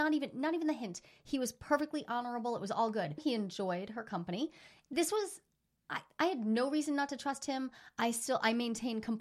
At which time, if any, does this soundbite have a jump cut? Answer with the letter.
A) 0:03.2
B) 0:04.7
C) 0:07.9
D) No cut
A